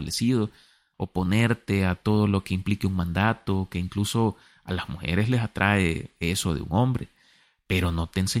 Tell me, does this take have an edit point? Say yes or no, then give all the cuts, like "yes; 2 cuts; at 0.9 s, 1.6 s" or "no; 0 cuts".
yes; 1 cut; at 0.9 s